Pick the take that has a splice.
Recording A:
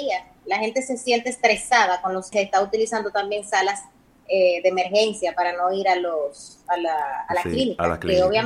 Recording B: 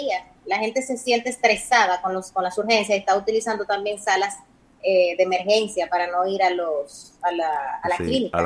A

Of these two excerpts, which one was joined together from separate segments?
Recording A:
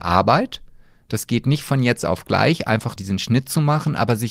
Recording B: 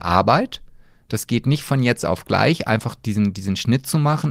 A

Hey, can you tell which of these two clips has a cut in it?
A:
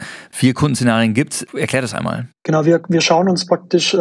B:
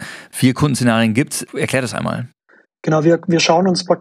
A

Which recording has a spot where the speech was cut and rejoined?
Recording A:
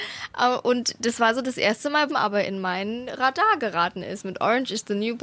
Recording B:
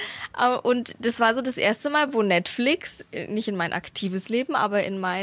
A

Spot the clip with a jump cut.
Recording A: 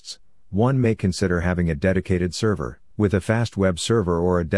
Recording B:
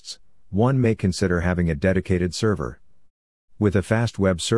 A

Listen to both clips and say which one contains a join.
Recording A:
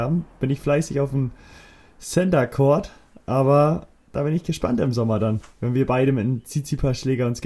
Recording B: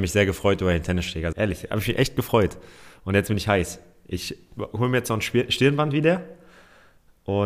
B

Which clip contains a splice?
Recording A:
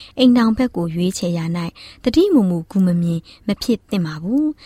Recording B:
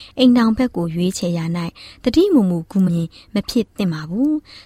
B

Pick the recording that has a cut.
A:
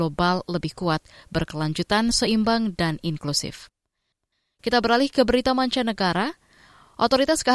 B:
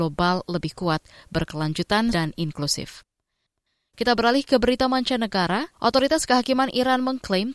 B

